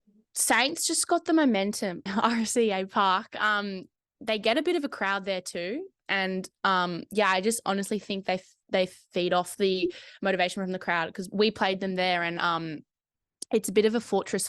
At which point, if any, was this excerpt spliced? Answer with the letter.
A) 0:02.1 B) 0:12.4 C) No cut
A